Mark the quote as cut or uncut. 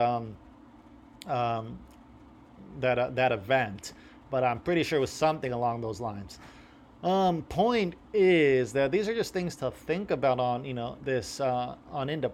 uncut